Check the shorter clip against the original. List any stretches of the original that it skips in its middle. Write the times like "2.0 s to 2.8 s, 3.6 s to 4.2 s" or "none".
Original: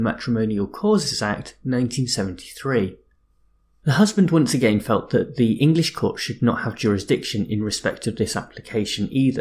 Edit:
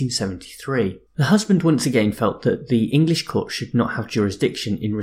3.0 s to 3.7 s